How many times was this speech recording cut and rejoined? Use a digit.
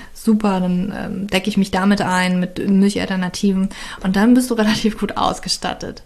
0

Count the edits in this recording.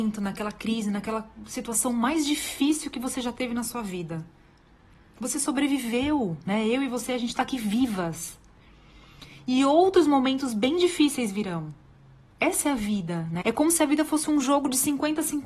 1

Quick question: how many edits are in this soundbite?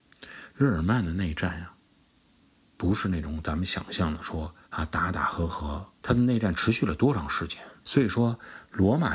3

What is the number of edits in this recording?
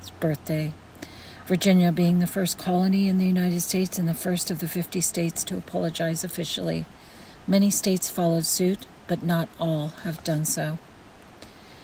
0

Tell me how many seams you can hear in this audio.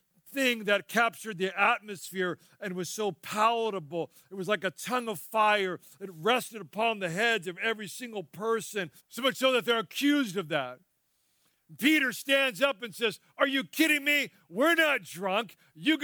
1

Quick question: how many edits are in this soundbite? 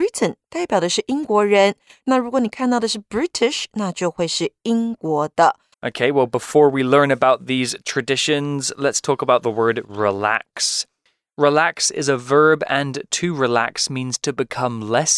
1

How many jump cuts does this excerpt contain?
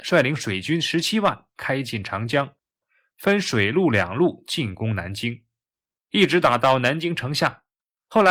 0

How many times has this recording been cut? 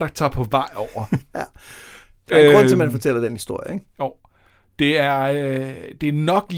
1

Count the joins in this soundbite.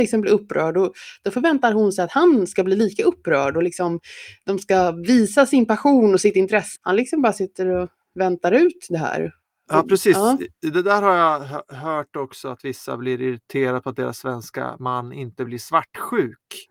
1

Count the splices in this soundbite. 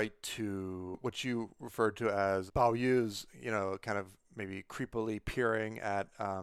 1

